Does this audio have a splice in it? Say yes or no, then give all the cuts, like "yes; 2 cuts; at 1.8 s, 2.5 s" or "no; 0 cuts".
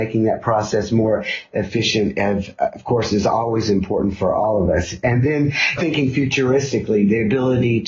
yes; 1 cut; at 5.8 s